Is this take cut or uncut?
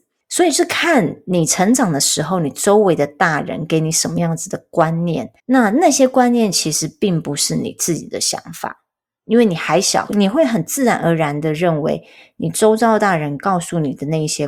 cut